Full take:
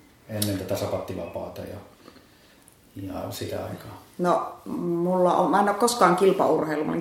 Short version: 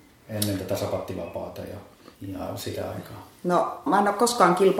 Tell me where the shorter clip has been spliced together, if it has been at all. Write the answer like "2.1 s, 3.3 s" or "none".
2.1 s, 3.9 s